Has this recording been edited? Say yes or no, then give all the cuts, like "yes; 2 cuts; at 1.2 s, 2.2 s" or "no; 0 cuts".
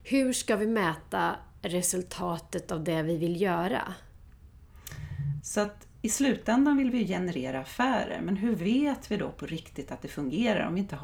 yes; 1 cut; at 5.4 s